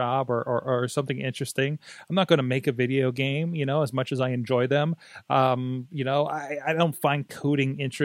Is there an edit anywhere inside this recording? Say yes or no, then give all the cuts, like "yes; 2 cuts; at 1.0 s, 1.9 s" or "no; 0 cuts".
no; 0 cuts